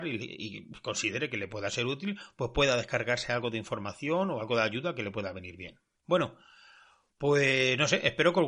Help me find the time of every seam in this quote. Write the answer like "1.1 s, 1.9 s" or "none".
5.9 s